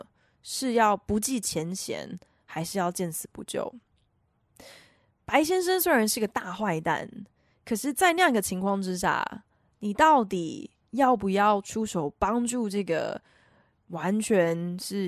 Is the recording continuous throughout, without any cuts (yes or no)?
yes